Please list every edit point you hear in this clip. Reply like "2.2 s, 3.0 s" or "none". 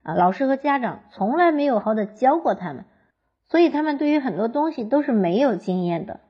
1.8 s